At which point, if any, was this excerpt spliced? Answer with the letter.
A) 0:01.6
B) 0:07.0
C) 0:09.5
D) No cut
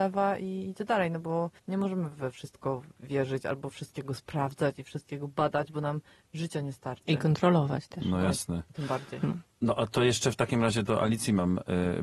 A